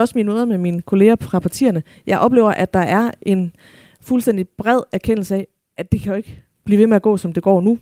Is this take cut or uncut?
uncut